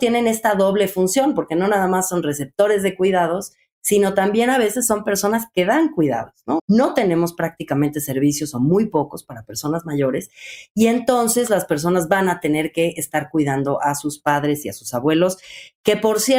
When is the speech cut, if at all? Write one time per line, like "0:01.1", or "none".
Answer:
0:06.6